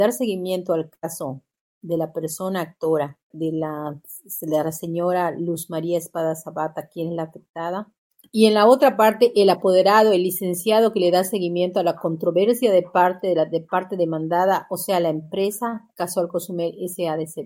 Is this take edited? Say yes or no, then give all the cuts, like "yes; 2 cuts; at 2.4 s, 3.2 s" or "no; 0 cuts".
yes; 1 cut; at 3.3 s